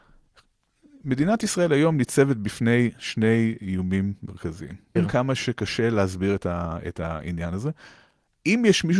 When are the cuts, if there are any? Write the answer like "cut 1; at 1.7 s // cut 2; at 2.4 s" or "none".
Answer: cut 1; at 5.0 s